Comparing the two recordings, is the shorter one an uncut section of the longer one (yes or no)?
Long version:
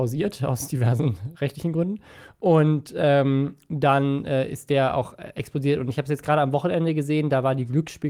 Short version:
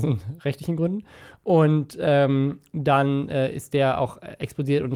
yes